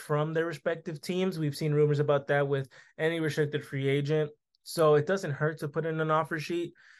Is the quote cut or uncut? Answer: uncut